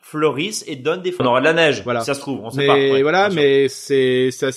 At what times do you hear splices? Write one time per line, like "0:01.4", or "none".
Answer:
0:01.2